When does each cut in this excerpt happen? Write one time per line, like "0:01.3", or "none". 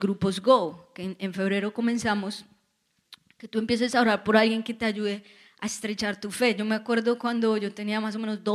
none